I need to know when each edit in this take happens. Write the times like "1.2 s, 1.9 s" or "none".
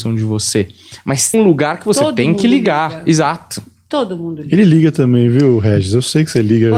1.3 s